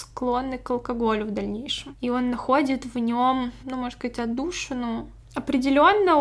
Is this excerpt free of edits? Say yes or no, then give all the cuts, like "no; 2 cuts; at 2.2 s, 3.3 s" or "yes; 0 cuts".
yes; 0 cuts